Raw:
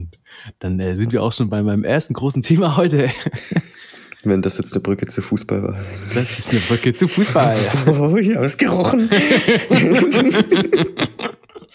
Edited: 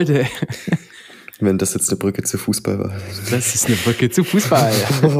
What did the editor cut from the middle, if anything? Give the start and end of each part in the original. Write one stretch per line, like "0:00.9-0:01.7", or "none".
none